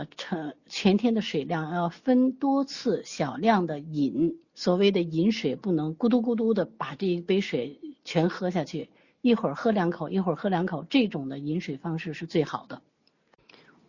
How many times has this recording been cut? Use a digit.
1